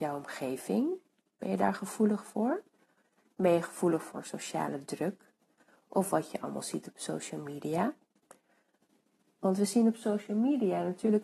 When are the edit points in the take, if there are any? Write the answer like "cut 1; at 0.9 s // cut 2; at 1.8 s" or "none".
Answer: none